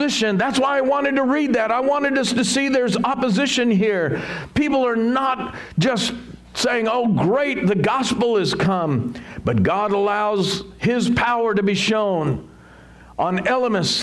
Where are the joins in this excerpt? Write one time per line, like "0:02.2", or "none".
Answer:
none

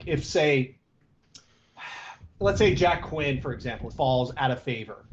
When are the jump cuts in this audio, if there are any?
0:03.9

